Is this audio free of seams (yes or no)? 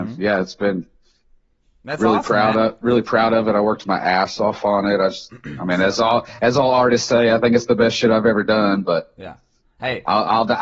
yes